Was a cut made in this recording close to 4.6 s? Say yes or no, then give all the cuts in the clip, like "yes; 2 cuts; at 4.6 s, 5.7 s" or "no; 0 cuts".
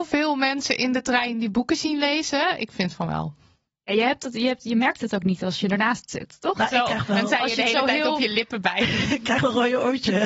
no; 0 cuts